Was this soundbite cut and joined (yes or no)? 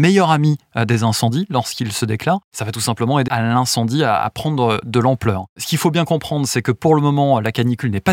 yes